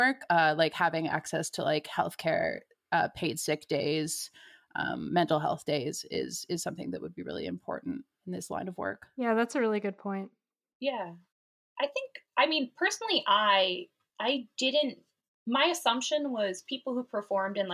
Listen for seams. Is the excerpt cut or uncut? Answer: uncut